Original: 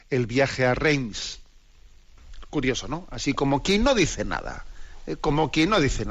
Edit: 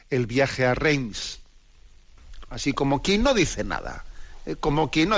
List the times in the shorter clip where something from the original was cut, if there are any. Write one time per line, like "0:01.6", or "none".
0:02.5